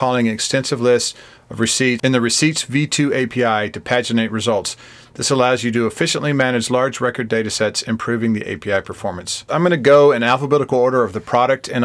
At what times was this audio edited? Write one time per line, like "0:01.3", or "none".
0:09.5